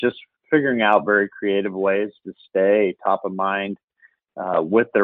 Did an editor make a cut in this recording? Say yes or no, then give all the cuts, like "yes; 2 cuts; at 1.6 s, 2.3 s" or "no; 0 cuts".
no; 0 cuts